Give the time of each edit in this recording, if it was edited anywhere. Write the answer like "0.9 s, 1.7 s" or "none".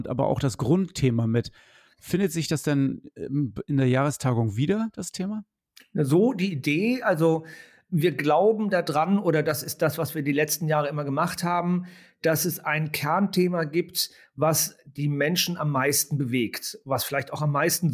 none

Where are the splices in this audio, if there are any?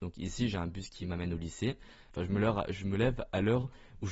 2.1 s

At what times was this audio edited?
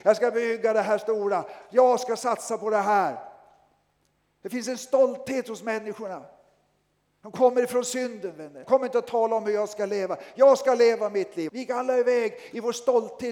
8.6 s, 11.5 s

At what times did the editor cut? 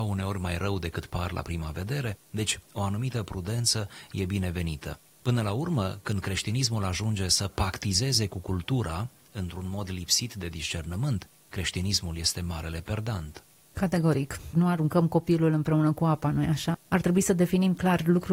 14.5 s, 16.7 s

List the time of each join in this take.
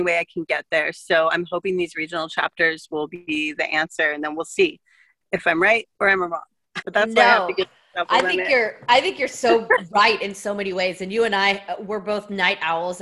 6.8 s

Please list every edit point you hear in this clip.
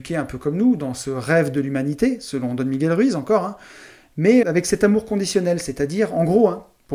4.4 s

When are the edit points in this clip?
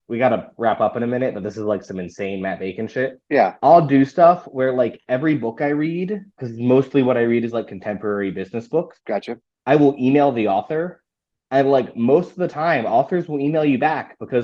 none

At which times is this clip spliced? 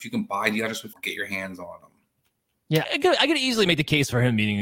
0.9 s, 2.8 s

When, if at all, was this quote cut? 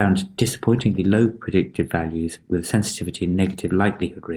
none

